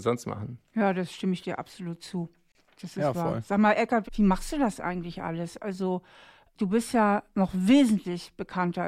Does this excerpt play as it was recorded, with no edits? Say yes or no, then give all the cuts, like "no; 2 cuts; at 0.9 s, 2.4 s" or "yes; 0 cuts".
no; 1 cut; at 4.0 s